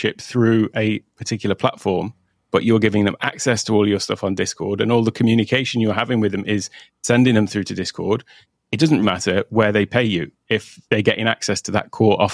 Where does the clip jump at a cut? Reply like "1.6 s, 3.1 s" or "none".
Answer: 9.0 s